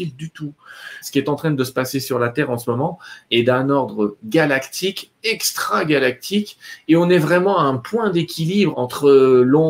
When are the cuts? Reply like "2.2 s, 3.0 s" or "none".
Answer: 1.0 s, 8.7 s